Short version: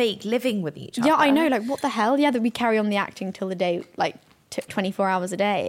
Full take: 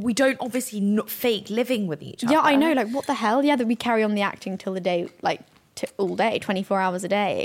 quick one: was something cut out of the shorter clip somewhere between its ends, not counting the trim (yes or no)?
yes